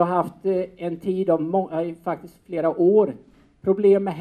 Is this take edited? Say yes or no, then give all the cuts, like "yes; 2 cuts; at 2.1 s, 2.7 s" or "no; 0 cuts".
no; 0 cuts